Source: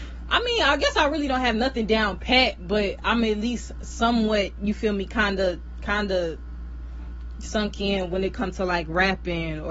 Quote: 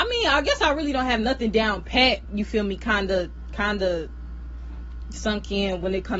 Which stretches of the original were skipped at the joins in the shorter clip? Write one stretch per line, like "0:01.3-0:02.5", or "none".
0:02.6-0:04.5